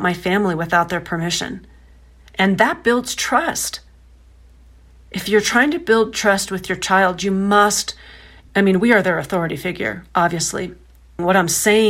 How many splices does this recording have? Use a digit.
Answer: 1